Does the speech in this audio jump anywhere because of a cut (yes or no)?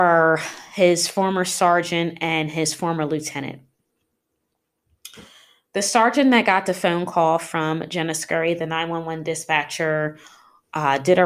no